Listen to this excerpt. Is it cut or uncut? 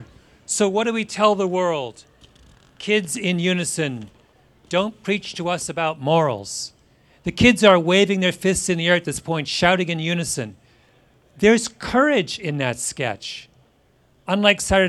uncut